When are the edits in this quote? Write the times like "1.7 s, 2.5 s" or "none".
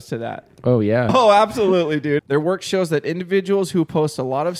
1.1 s, 2.2 s